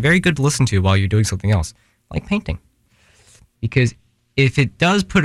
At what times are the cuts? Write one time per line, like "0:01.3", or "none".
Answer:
0:03.5